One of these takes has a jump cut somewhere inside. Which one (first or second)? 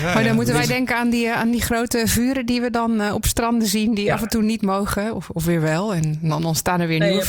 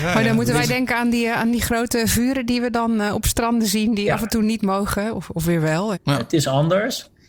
second